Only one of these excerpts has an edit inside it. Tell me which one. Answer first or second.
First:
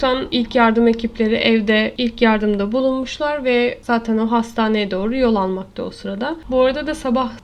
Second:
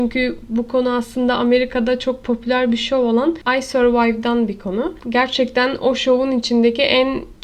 first